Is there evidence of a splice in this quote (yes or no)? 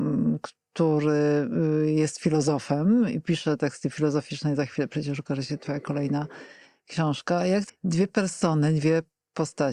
yes